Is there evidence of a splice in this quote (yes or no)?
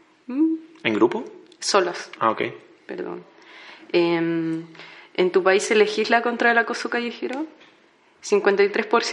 no